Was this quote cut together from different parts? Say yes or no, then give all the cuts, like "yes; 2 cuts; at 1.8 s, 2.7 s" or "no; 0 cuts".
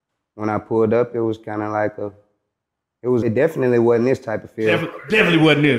yes; 1 cut; at 3.2 s